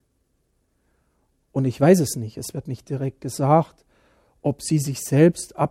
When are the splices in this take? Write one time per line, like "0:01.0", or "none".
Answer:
none